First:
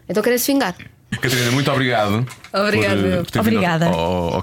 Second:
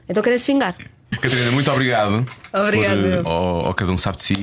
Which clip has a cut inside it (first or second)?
second